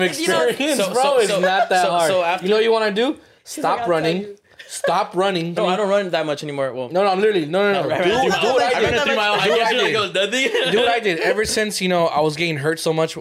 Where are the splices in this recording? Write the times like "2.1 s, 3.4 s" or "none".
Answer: 5.6 s